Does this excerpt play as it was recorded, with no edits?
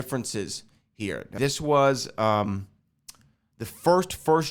no; 1 cut; at 1.4 s

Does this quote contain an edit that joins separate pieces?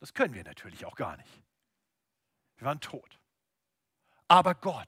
no; 0 cuts

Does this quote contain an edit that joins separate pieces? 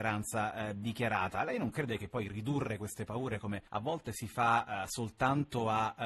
yes; 1 cut; at 3.7 s

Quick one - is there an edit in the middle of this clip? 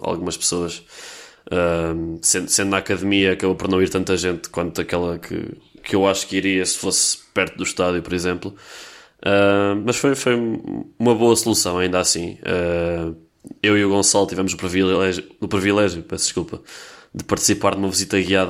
no; 0 cuts

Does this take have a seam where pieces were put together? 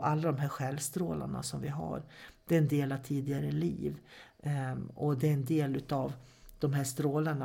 no; 0 cuts

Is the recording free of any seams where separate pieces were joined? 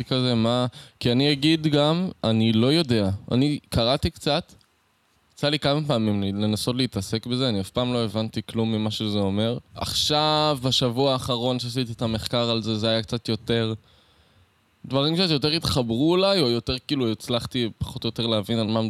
no; 1 cut; at 9.6 s

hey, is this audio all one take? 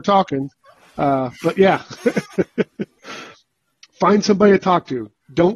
yes; 0 cuts

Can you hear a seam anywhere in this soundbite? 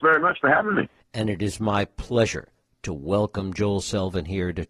yes; 1 cut; at 1.0 s

